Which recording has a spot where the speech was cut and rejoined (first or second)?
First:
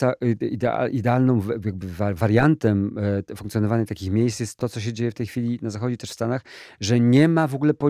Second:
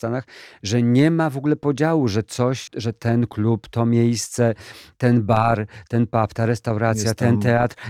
second